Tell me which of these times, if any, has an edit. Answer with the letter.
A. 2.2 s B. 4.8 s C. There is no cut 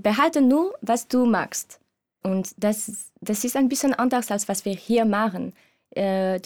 A